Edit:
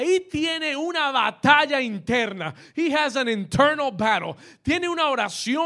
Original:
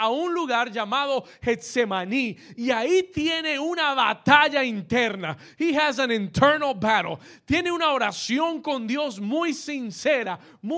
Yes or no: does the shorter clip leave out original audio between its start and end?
no